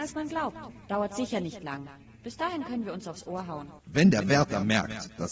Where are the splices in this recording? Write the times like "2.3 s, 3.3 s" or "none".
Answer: 3.8 s

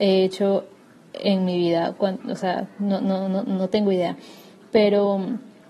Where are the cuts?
none

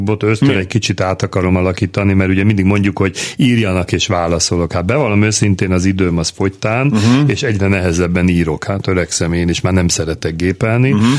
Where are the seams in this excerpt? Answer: none

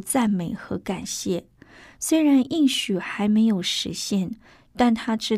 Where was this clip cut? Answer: none

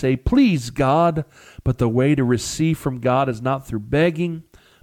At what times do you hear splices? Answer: none

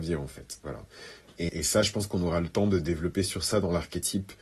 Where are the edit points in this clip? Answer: 1.5 s

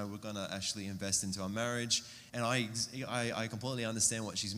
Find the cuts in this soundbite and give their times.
2.3 s

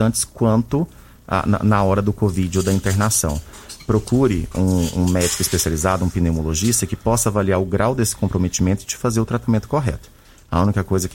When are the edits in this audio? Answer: none

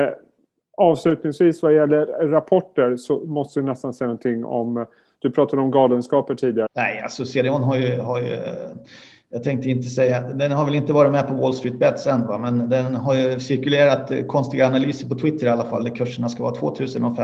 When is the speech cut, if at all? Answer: 6.7 s

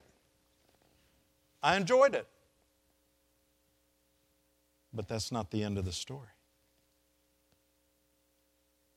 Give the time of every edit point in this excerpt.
none

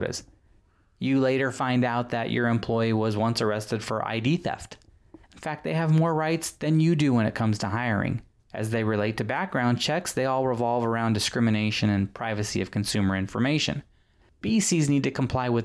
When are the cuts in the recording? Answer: 5.2 s, 8.4 s

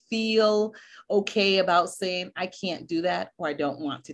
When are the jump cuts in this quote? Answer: none

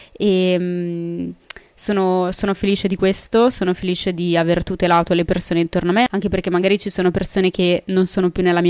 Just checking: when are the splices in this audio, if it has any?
none

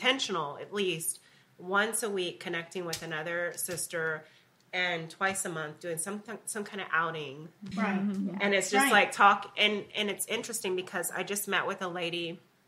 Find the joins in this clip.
7.7 s

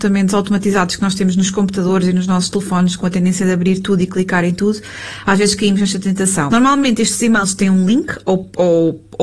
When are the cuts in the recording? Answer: 6.5 s

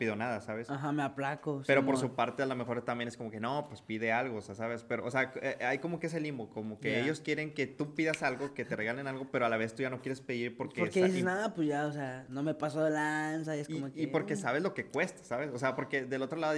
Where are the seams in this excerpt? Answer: none

